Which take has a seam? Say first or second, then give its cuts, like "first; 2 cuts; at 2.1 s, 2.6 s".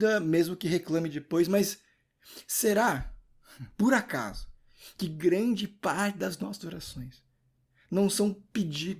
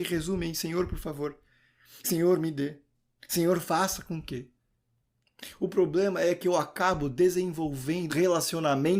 second; 1 cut; at 8.1 s